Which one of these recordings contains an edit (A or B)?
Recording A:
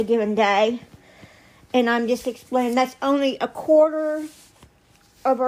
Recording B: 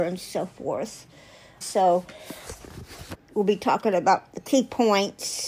B